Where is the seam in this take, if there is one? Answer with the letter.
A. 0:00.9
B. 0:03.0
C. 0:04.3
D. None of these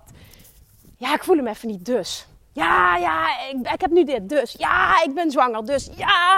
D